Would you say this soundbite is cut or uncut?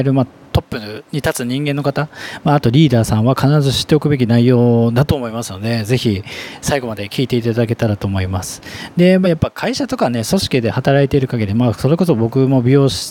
uncut